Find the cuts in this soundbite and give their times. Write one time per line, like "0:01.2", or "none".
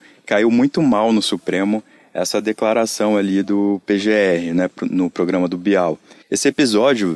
0:06.2

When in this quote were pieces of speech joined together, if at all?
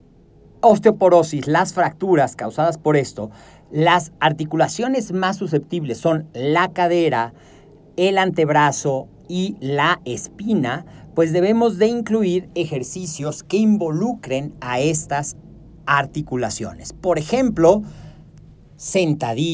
none

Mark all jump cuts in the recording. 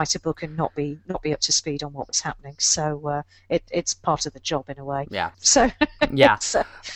0:05.3

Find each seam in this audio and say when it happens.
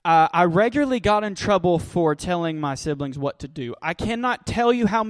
none

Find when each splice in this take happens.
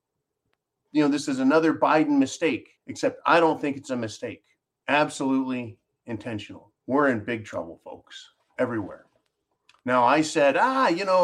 0:02.8
0:04.8
0:06.8

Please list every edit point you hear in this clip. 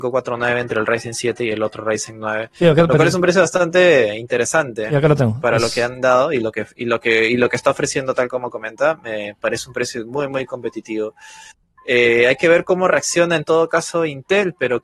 none

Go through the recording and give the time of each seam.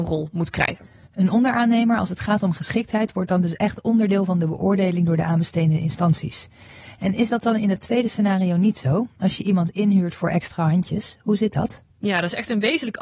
none

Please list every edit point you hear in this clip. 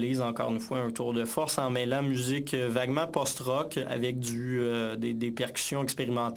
none

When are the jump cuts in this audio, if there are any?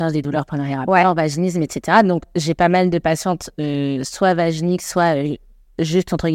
none

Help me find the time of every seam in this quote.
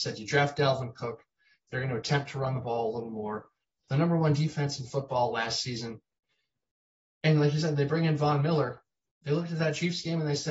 none

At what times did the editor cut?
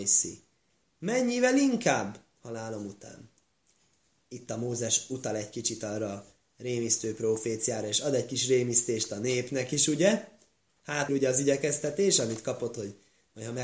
0:11.1

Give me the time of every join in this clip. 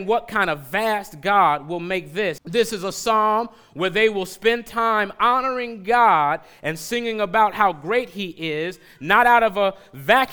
0:02.4

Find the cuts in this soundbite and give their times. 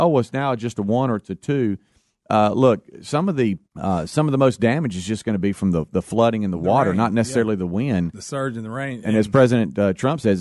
0:03.7

